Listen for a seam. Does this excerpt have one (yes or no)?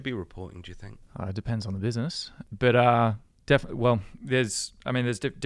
no